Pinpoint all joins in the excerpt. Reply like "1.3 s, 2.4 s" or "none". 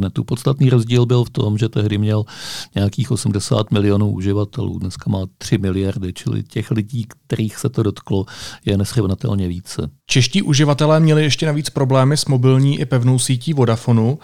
10.0 s

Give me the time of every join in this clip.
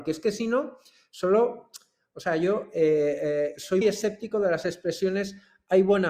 3.8 s

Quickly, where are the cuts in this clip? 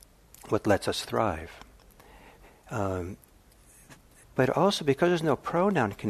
4.2 s

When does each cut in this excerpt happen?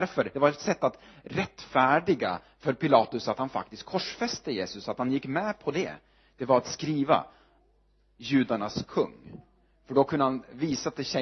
none

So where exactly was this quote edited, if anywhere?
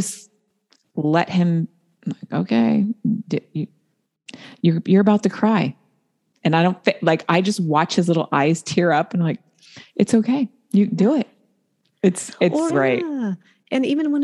12.7 s

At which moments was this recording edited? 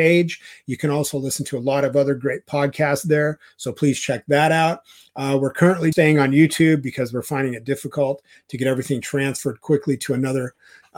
5.9 s

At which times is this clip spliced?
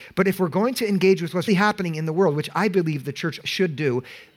1.5 s, 3.4 s

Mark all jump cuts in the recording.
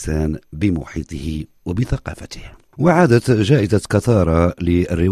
2.7 s

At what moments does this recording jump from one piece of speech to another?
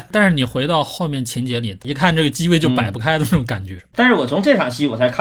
1.8 s, 3.8 s

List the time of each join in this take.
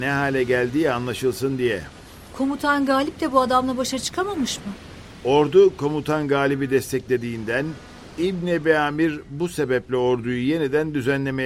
none

